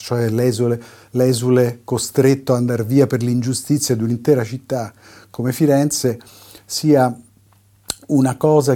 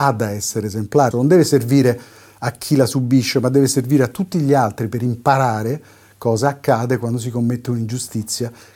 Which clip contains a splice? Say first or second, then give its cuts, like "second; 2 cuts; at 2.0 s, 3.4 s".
second; 1 cut; at 1.1 s